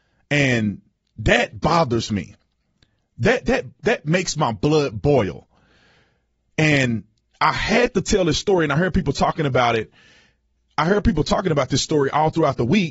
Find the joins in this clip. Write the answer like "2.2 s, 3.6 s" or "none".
none